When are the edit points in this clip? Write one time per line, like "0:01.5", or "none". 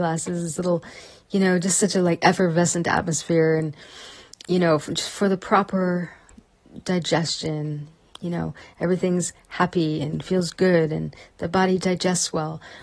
0:04.3
0:08.1